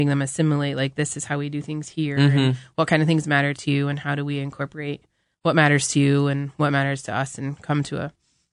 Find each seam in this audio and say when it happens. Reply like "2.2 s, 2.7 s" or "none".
none

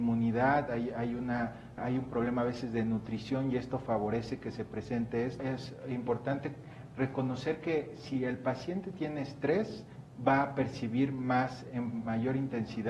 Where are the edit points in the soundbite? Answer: 1.8 s, 5.4 s

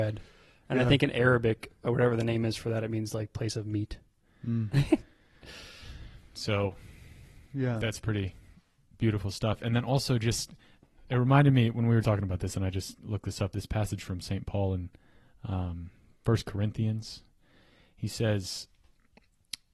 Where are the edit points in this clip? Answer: 12.0 s

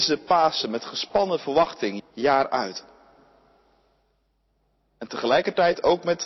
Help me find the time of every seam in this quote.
2.0 s

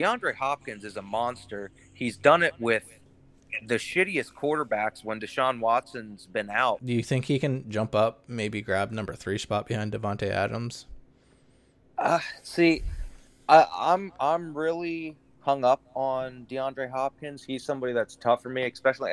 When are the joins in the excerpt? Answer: 6.8 s

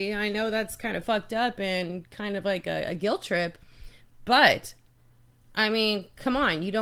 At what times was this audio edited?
none

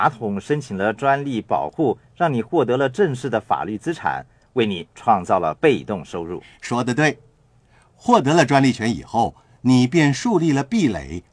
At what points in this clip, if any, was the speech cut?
none

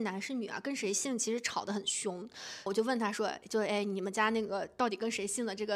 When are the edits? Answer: 2.7 s

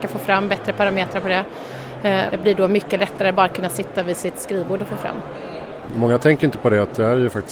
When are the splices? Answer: 2.3 s, 5.9 s

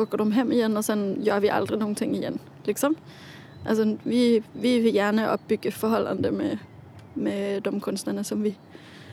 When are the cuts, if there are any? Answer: none

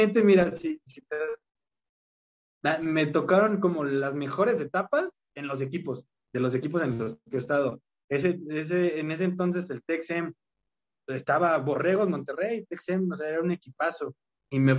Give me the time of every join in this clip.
none

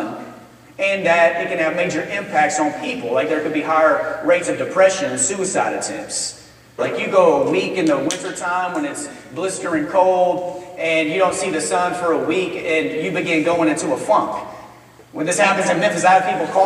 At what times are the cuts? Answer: 6.8 s

